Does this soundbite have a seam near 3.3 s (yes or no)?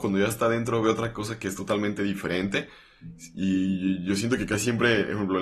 no